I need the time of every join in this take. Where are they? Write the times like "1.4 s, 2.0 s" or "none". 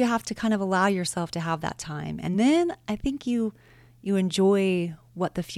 none